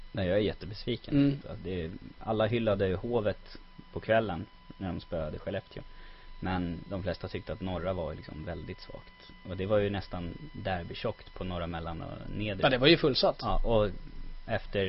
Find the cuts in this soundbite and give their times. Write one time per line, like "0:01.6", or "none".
0:01.4